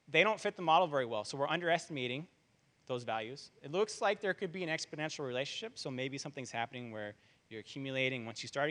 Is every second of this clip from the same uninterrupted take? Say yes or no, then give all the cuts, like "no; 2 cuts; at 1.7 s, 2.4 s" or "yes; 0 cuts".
yes; 0 cuts